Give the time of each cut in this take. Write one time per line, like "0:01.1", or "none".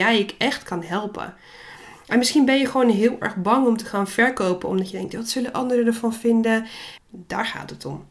0:07.0